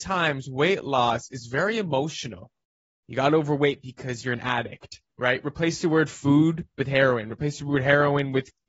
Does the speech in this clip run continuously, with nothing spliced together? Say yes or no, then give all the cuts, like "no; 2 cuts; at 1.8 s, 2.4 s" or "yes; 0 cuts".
no; 2 cuts; at 3.0 s, 5.1 s